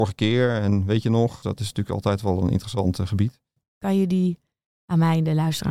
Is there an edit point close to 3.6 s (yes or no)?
yes